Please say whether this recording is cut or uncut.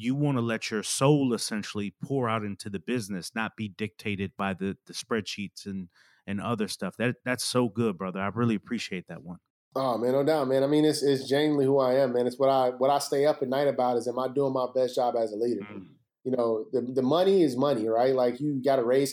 uncut